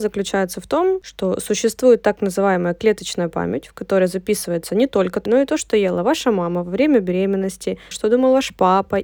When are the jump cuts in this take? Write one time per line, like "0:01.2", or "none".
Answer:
0:05.3
0:07.9